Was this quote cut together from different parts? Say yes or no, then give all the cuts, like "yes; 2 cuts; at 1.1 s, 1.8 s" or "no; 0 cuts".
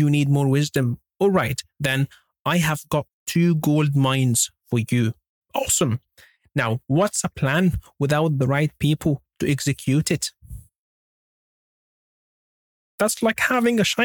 yes; 1 cut; at 5.4 s